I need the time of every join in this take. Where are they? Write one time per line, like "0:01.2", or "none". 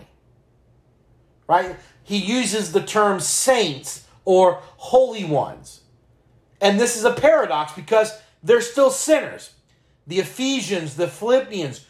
none